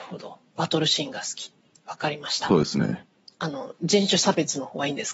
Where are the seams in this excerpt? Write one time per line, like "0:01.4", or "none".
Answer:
none

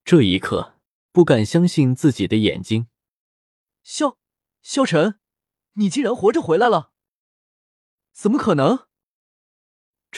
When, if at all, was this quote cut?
0:01.1

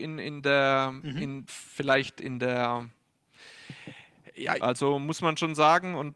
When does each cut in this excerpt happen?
0:01.5
0:04.6

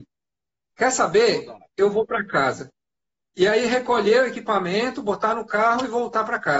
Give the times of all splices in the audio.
none

